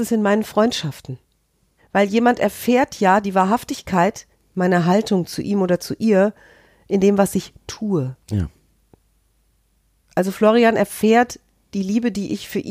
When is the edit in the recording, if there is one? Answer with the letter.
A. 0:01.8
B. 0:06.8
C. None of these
A